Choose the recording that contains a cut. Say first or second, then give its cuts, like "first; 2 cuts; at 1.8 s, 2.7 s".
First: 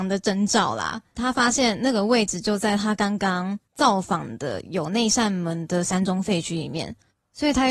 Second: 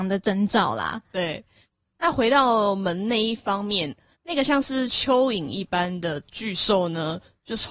second; 1 cut; at 1.1 s